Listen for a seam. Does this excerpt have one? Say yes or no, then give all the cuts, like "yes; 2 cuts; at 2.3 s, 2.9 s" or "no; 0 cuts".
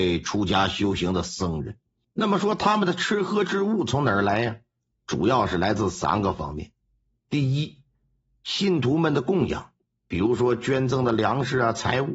yes; 1 cut; at 2.0 s